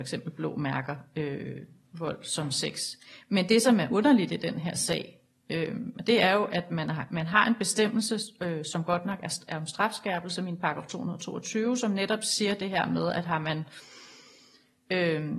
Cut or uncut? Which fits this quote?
uncut